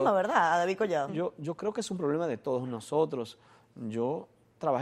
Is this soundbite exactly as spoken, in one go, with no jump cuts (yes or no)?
no